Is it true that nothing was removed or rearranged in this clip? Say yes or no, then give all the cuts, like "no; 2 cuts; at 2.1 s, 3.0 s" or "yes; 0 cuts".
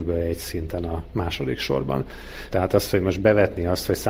no; 1 cut; at 2.5 s